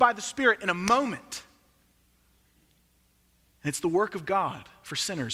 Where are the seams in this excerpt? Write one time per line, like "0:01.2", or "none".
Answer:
none